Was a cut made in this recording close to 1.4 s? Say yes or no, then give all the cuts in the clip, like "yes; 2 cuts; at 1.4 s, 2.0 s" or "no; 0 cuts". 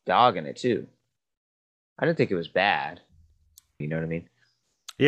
no; 1 cut; at 3.8 s